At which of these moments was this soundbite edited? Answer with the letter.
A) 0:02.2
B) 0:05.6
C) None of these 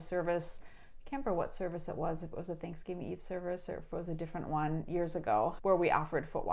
B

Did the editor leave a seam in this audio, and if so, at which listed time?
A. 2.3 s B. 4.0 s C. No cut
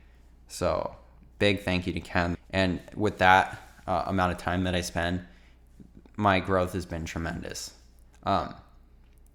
A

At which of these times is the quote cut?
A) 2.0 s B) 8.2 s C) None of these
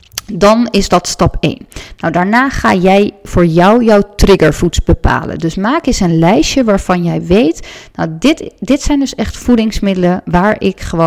C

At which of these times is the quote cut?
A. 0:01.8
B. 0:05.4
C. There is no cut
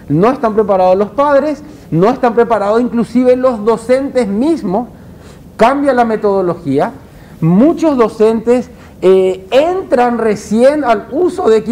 B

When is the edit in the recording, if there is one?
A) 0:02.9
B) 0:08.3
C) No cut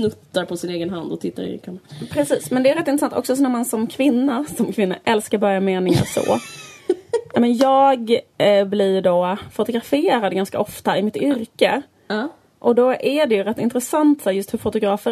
C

